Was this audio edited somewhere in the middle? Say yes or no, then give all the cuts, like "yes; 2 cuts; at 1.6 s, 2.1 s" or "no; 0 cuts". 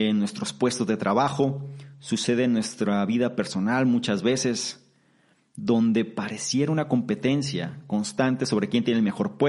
no; 0 cuts